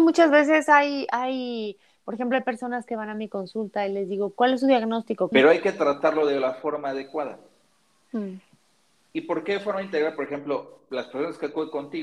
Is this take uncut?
no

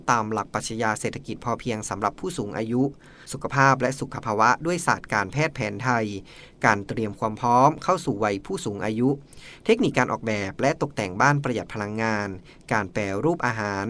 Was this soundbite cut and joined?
no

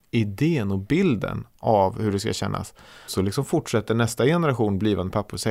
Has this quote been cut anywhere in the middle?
yes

